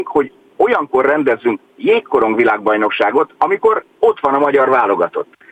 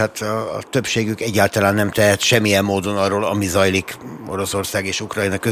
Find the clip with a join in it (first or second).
first